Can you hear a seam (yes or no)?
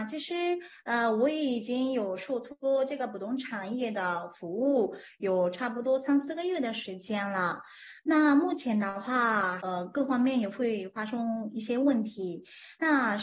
yes